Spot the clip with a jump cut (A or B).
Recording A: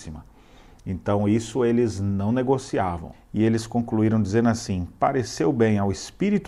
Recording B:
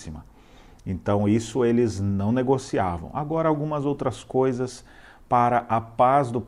A